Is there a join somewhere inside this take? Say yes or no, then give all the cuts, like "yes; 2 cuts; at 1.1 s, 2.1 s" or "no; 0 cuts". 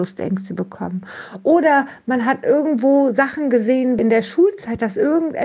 yes; 1 cut; at 4.0 s